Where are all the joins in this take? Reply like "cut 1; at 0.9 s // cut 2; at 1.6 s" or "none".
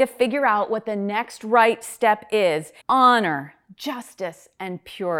cut 1; at 2.8 s